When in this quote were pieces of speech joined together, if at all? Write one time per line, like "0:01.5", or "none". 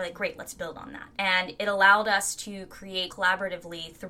0:01.1
0:03.1